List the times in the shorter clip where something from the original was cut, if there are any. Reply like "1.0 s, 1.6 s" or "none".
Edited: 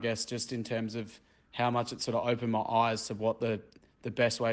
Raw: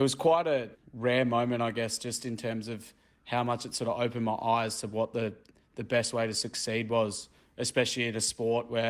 none